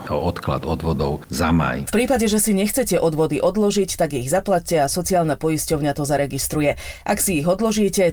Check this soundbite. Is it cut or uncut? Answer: uncut